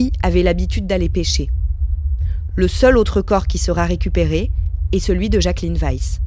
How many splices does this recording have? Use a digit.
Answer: 0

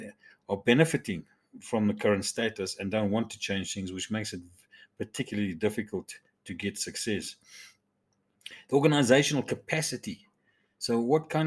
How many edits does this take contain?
0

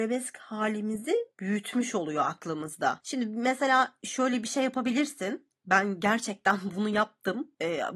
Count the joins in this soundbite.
1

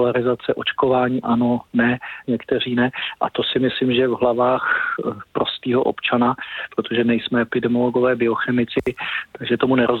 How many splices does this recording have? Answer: 1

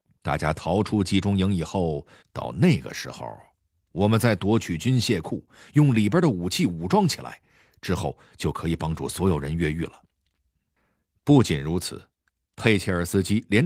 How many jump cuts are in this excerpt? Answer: 1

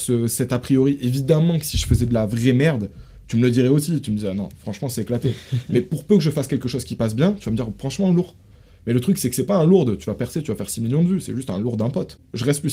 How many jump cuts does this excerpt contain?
0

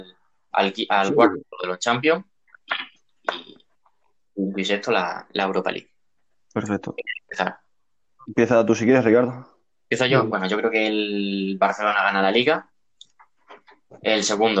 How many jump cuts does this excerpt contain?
0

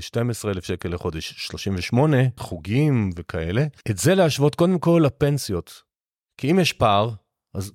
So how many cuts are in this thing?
3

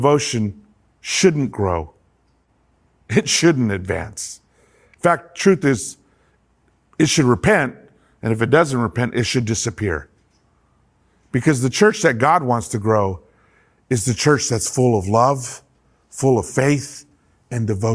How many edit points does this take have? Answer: 0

